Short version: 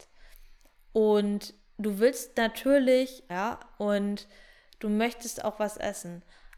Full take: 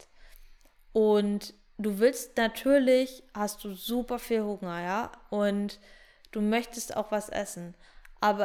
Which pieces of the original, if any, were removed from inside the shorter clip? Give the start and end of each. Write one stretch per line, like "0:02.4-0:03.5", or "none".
0:03.3-0:04.8